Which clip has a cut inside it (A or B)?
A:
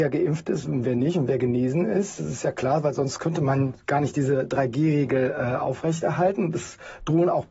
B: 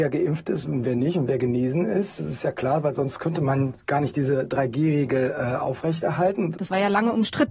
B